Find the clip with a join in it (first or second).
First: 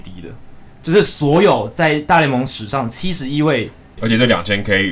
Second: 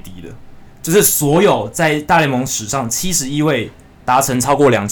first